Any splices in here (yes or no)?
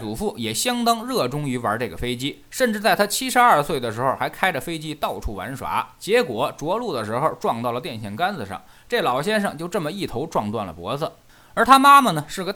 no